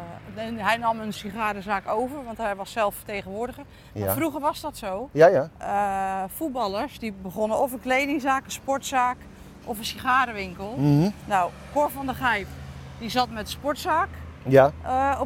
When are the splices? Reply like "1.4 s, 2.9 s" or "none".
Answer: none